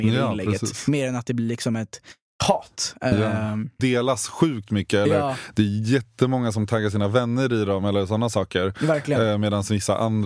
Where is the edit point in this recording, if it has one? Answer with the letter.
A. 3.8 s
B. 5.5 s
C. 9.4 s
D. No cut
A